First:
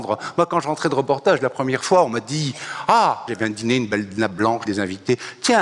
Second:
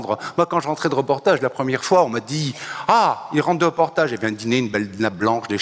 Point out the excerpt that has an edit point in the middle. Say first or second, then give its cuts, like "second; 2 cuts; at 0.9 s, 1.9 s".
first; 2 cuts; at 3.3 s, 4.7 s